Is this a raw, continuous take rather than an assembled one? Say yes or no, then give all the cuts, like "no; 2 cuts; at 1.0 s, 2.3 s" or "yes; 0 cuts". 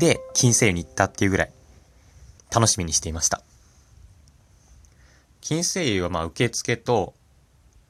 no; 1 cut; at 2.4 s